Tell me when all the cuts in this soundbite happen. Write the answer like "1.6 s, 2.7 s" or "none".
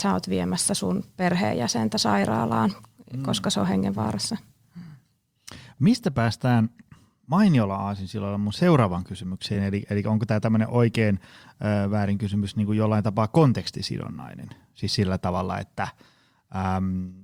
none